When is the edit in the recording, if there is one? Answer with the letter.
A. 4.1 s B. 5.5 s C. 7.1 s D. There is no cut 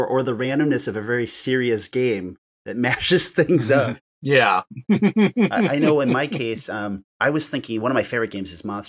C